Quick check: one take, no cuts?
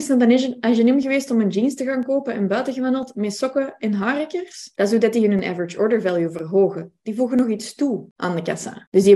yes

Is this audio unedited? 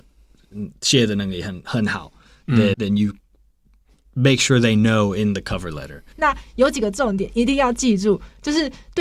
no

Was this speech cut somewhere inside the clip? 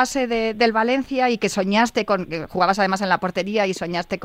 no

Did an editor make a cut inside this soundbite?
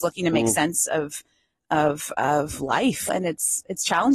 yes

